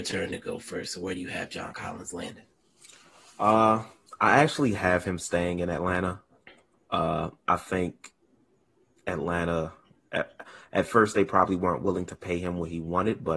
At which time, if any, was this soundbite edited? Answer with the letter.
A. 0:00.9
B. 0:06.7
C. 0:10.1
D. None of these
B